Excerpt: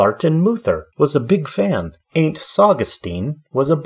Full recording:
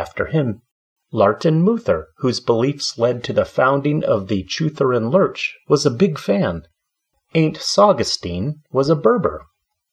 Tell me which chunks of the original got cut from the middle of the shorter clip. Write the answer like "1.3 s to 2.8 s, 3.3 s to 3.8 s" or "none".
2.1 s to 5.6 s, 6.7 s to 7.2 s